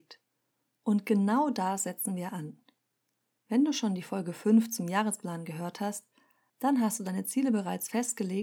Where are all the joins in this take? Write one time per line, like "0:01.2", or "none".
none